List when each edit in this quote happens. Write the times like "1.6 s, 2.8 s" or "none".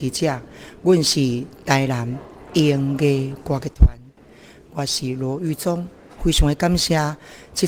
none